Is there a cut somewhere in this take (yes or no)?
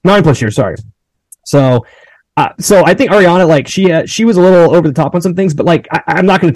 no